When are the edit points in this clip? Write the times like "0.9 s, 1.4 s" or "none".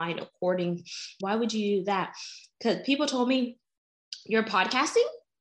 1.2 s